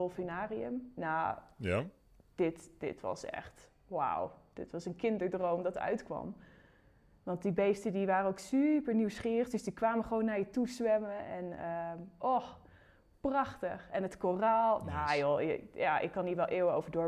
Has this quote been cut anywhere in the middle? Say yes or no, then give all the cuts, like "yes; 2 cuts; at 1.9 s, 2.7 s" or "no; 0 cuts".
no; 0 cuts